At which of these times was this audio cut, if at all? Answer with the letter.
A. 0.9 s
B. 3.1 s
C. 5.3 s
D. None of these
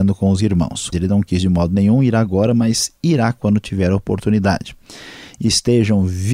A